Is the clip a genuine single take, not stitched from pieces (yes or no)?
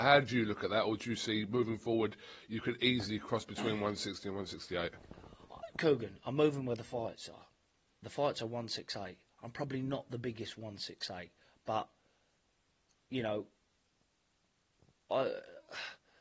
yes